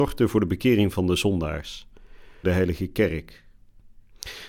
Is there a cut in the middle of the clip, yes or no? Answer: yes